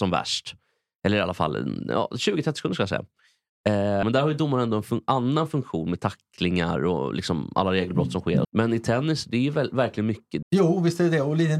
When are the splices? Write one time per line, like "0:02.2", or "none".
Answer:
0:04.0
0:08.4
0:10.4